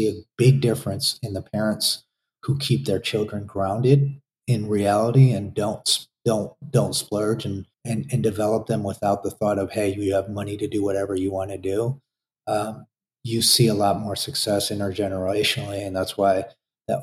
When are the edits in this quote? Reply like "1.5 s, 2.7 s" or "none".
7.7 s